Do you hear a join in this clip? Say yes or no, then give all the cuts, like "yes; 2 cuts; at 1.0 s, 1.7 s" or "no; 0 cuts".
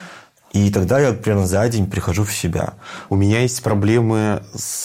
yes; 1 cut; at 3.1 s